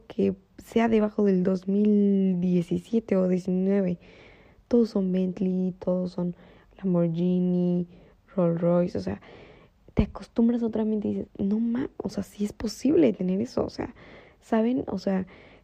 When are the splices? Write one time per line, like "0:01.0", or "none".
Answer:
0:11.3